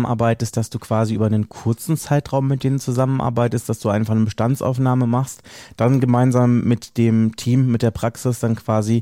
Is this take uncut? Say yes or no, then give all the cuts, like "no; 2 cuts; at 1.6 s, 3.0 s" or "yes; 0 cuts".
yes; 0 cuts